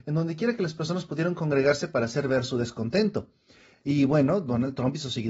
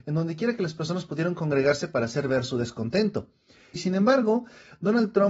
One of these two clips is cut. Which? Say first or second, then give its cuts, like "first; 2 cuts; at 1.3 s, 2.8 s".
second; 1 cut; at 3.8 s